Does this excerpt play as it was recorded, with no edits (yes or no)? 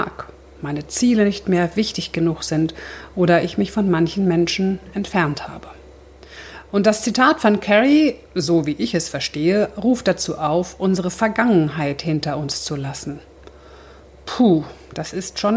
yes